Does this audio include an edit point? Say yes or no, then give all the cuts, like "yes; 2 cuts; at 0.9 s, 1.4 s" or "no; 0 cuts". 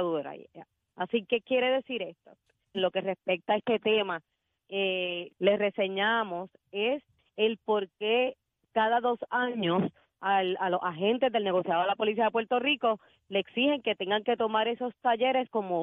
yes; 2 cuts; at 2.7 s, 5.3 s